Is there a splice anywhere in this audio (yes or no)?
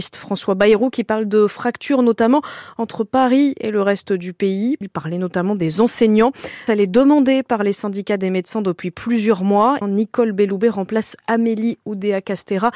yes